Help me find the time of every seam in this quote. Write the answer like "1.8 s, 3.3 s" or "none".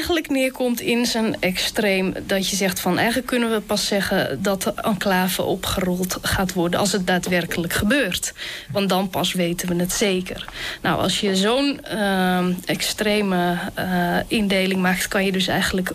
none